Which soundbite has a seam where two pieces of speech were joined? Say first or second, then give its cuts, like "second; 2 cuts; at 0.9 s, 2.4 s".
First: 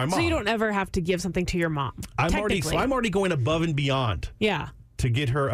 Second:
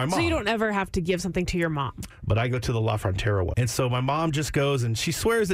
second; 2 cuts; at 2.1 s, 3.5 s